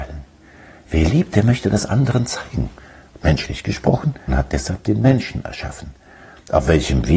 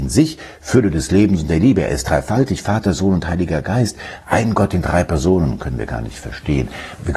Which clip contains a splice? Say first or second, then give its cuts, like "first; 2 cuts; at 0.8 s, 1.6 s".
first; 1 cut; at 4.3 s